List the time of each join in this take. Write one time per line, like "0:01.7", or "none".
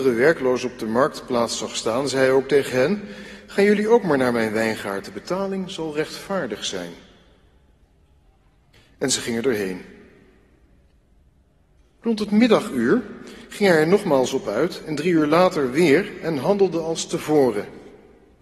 0:14.8